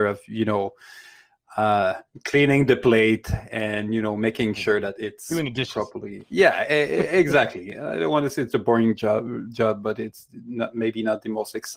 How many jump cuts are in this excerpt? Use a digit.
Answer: 0